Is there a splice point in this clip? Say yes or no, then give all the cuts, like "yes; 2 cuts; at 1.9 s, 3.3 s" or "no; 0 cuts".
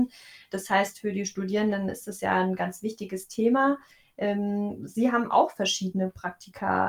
no; 0 cuts